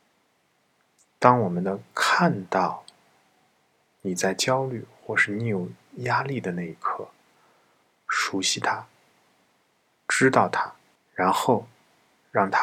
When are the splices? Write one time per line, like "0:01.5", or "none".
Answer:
0:07.9
0:11.0